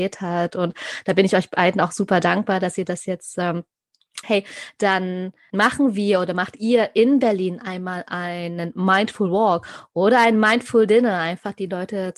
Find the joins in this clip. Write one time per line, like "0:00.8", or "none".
0:04.2